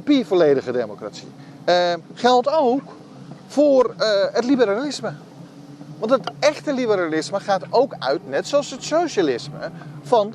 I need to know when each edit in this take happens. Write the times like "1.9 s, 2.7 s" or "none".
none